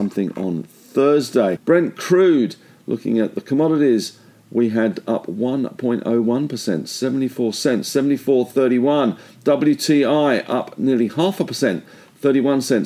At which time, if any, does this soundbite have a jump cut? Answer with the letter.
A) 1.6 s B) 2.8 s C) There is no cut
A